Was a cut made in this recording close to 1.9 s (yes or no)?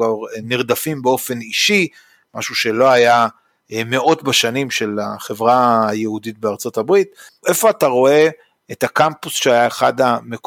no